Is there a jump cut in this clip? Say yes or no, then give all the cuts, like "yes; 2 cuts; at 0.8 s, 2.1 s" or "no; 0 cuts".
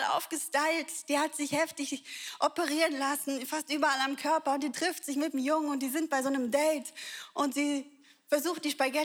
no; 0 cuts